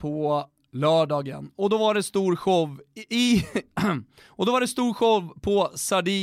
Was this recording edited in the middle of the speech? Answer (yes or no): no